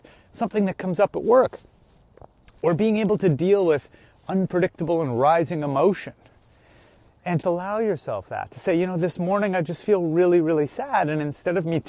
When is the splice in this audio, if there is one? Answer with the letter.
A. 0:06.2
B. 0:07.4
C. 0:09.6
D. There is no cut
B